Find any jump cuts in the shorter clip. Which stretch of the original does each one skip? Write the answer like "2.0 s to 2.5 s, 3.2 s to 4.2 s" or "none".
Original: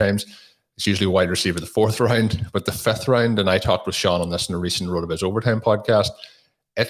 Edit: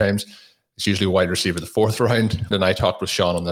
2.5 s to 3.4 s